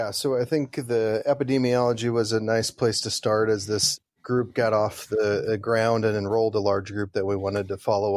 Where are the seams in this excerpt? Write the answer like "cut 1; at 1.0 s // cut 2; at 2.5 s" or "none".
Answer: none